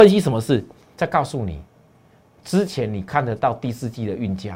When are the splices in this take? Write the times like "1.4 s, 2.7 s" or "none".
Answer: 0.9 s